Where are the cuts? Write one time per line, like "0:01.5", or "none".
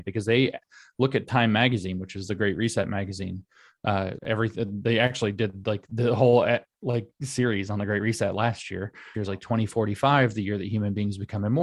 0:04.2
0:09.1

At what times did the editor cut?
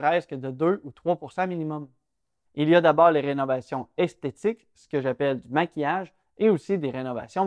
0:02.5

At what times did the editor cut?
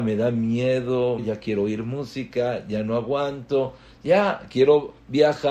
0:01.2

